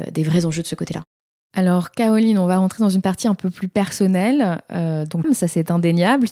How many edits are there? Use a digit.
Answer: 1